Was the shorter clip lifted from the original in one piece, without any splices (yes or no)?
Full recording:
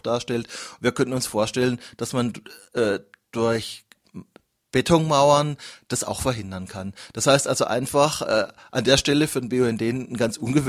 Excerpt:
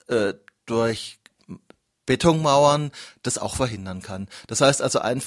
yes